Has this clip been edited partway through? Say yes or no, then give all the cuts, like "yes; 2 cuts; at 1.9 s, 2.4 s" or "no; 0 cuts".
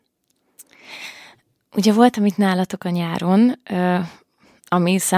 no; 0 cuts